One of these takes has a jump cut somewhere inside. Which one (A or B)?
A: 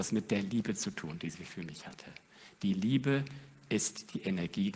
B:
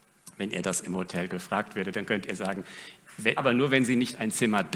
B